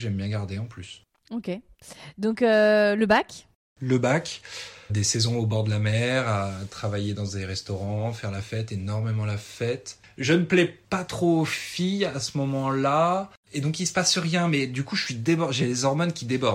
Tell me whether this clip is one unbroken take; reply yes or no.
no